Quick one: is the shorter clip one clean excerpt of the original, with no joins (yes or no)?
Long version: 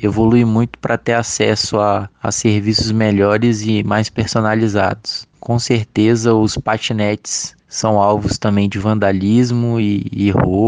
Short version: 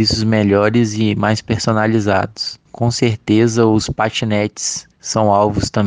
yes